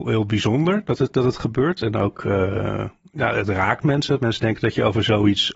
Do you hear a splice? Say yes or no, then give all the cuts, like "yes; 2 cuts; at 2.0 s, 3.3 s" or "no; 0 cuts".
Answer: no; 0 cuts